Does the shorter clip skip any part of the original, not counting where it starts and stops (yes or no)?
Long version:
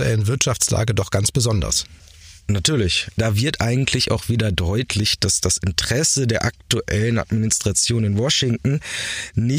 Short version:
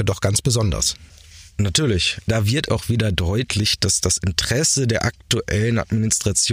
yes